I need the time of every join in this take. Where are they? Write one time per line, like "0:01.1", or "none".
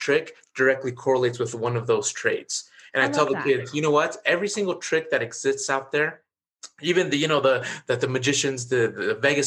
none